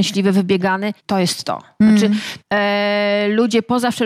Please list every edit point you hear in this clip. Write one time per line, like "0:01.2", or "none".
0:01.0
0:02.4